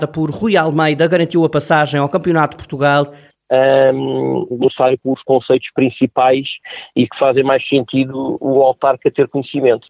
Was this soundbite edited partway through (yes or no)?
yes